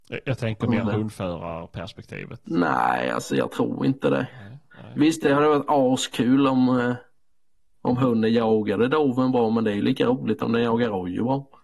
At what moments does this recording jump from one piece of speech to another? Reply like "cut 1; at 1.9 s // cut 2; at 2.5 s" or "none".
none